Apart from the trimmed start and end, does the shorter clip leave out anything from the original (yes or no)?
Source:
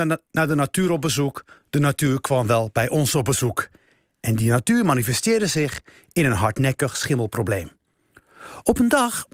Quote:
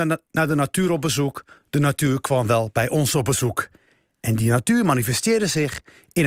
no